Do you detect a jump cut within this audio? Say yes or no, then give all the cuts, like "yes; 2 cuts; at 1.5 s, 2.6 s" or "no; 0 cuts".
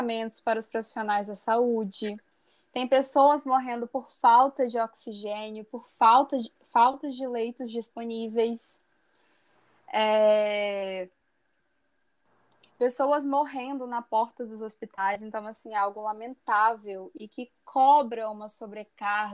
no; 0 cuts